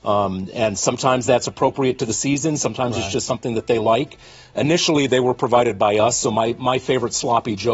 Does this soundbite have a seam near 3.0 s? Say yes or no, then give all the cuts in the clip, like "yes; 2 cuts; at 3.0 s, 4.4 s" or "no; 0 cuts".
no; 0 cuts